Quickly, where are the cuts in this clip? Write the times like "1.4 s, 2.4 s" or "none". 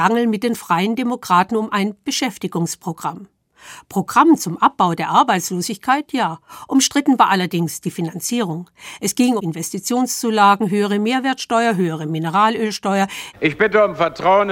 9.4 s, 13.3 s